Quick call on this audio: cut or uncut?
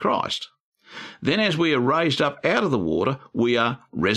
uncut